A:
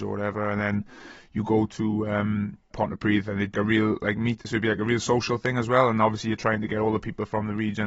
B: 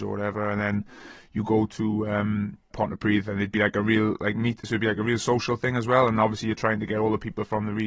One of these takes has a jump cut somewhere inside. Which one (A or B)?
A